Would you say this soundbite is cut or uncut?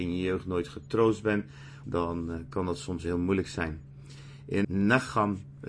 cut